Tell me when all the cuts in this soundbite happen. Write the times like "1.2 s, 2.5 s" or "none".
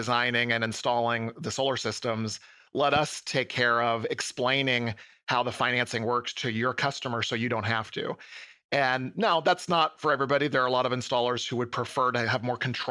none